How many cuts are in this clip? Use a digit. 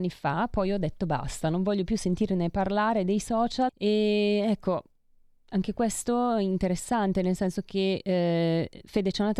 1